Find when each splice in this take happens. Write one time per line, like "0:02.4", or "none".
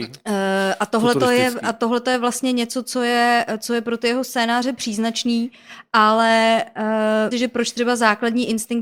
0:07.3